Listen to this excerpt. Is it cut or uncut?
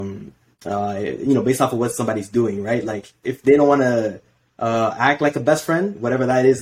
cut